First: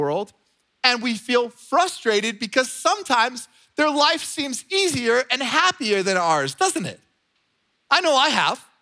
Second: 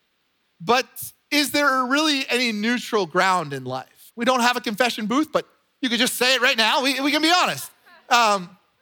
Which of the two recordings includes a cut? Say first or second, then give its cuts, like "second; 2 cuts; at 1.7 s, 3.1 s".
second; 1 cut; at 4.1 s